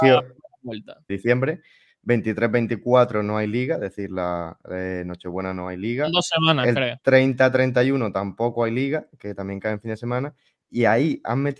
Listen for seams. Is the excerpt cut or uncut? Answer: cut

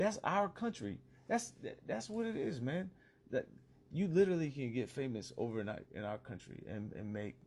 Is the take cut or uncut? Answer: uncut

